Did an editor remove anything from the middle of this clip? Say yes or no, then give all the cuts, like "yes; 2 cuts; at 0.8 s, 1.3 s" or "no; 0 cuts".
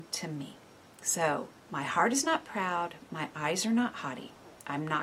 yes; 1 cut; at 1.6 s